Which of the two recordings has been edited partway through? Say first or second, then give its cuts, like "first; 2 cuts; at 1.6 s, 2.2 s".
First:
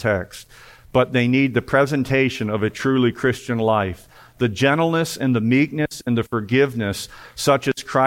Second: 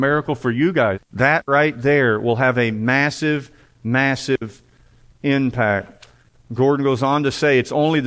second; 1 cut; at 0.9 s